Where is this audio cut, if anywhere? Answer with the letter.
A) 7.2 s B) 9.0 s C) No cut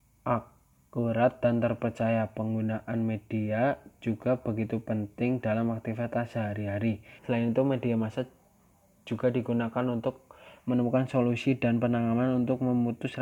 A